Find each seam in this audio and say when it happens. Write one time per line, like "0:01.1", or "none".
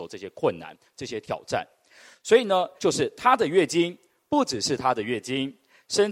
0:02.8